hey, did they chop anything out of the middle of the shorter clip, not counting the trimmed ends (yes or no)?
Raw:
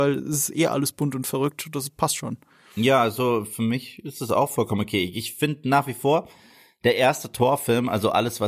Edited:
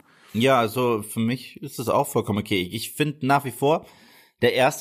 no